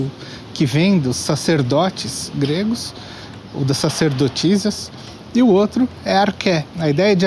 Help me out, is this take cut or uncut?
uncut